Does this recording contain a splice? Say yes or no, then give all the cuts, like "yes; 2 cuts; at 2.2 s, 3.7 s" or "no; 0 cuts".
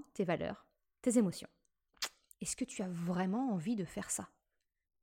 yes; 1 cut; at 2.3 s